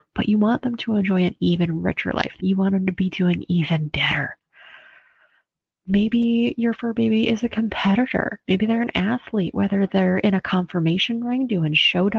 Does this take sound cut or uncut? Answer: cut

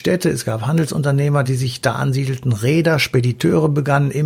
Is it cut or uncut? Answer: uncut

